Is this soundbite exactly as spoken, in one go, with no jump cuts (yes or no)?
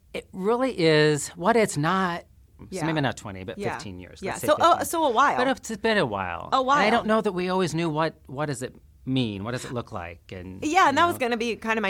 no